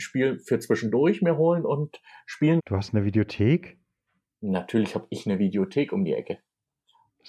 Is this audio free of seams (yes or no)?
no